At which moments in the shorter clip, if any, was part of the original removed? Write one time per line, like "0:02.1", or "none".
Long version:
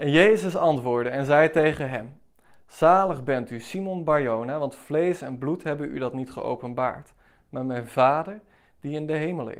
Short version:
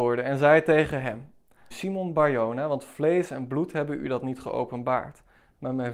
0:01.7